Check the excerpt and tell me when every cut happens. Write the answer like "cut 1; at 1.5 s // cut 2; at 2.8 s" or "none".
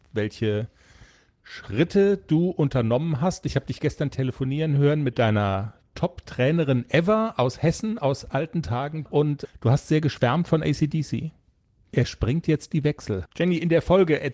cut 1; at 9.1 s // cut 2; at 13.3 s